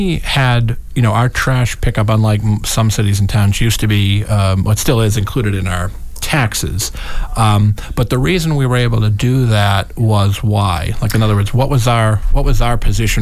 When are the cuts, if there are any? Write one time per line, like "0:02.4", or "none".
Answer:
none